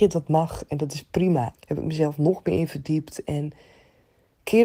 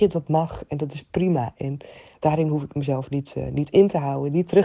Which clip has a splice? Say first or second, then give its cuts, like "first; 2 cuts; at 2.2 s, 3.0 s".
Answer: first; 1 cut; at 1.5 s